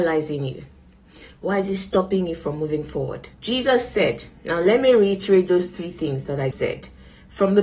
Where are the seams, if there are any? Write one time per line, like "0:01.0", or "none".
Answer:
0:03.3
0:06.5

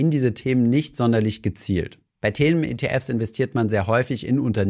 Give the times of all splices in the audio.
none

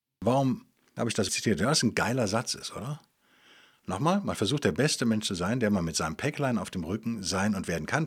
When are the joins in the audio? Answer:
0:01.3

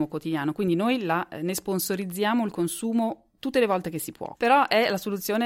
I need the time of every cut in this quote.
0:04.3

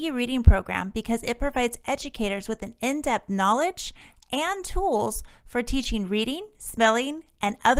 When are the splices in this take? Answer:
none

